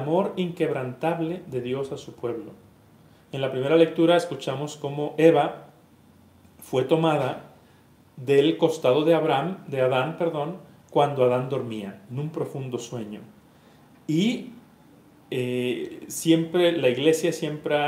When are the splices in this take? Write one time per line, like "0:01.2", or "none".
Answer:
none